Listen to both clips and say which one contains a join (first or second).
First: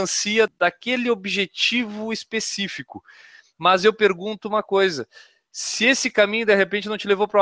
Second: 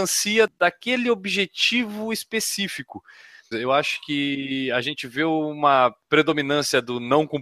second